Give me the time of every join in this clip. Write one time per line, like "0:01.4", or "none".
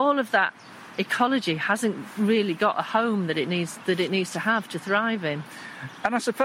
0:01.0